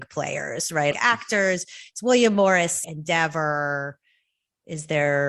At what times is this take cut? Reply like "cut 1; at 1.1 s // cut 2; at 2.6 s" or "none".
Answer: cut 1; at 0.9 s // cut 2; at 2.8 s